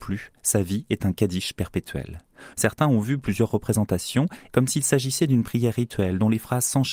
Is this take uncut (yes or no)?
no